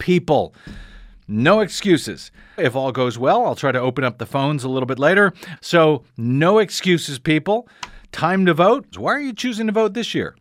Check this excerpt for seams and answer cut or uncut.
cut